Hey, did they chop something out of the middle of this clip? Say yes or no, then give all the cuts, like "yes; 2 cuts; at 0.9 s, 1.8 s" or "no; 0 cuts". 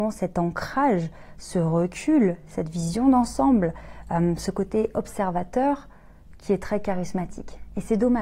no; 0 cuts